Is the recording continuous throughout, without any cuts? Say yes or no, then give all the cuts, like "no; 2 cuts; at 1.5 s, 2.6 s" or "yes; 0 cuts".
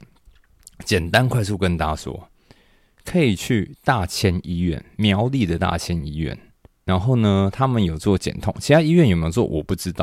yes; 0 cuts